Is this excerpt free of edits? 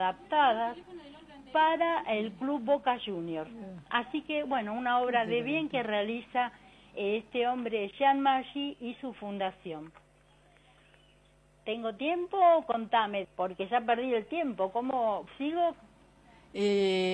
no; 1 cut; at 13.2 s

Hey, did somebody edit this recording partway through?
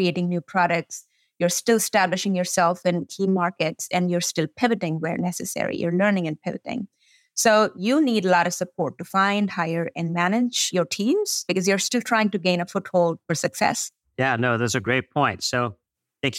no; 0 cuts

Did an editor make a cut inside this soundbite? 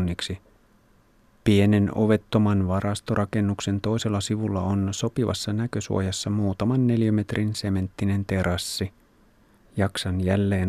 yes; 2 cuts; at 1.4 s, 9.6 s

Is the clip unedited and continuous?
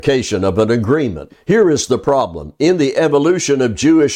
no; 1 cut; at 1.3 s

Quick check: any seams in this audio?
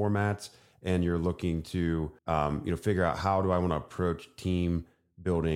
yes; 1 cut; at 2.2 s

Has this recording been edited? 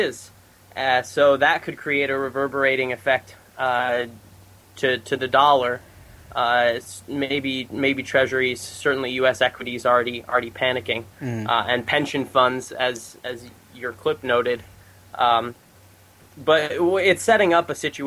no; 0 cuts

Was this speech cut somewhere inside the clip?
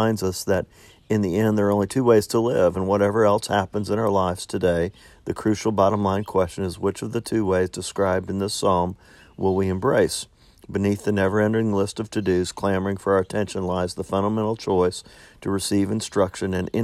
no; 0 cuts

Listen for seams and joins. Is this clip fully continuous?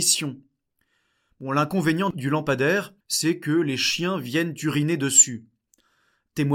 no; 1 cut; at 3.0 s

